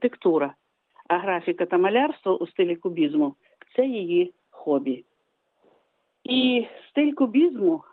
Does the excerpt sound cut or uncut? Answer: uncut